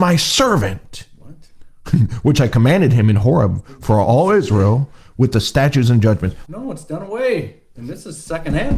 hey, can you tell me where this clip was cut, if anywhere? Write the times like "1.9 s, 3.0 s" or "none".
6.4 s, 7.7 s